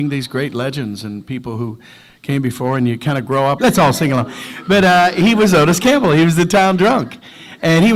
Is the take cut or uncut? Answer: cut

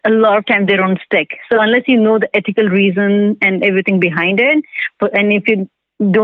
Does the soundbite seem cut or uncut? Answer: uncut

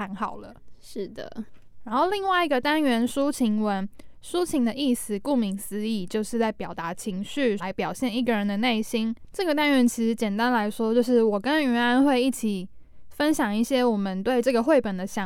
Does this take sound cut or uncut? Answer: cut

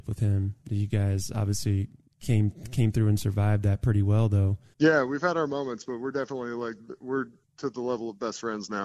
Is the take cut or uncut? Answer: cut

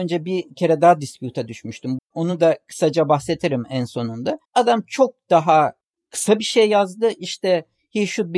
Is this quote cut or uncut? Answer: cut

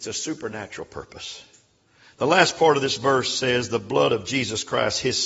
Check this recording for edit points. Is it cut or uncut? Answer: uncut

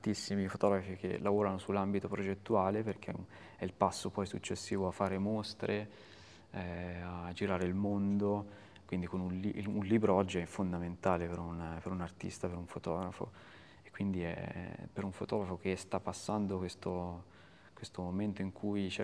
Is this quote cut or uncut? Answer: uncut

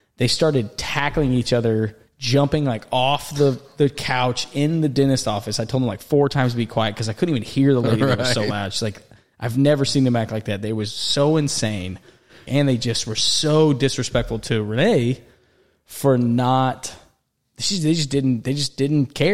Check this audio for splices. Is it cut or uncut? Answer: cut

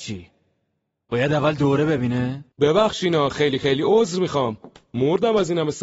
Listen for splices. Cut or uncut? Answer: cut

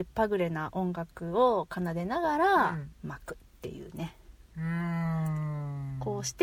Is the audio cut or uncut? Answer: cut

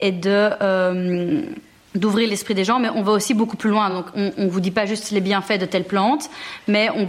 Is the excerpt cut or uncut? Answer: uncut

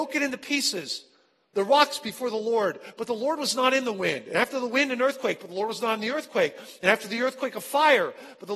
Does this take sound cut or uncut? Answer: uncut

